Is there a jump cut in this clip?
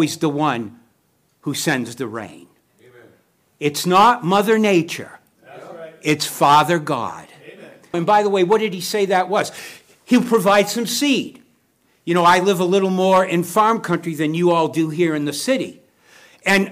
yes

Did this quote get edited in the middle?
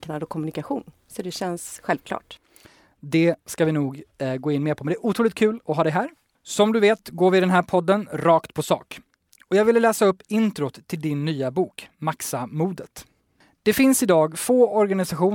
no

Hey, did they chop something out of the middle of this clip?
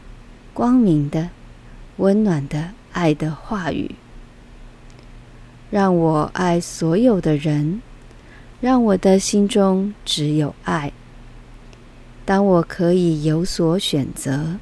yes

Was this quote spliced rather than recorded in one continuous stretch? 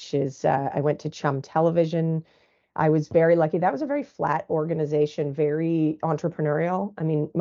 no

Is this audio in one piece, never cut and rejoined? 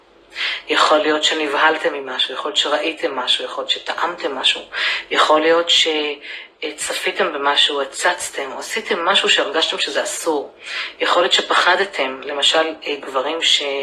yes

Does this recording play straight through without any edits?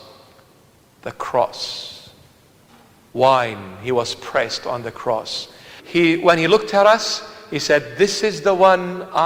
no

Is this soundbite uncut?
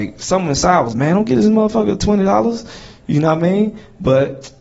no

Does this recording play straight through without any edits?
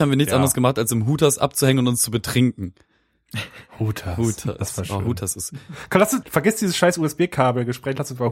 no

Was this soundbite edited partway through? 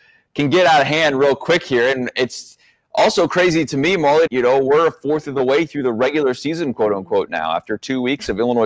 yes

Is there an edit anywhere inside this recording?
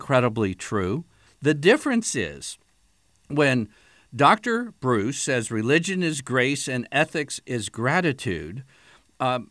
yes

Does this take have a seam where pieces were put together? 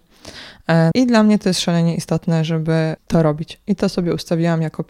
yes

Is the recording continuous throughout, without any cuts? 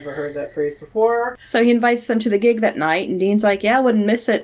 yes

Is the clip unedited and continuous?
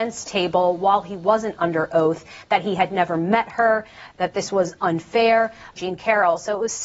no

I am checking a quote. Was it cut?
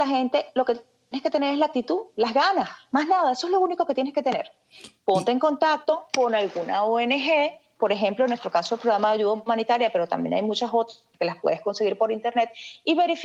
no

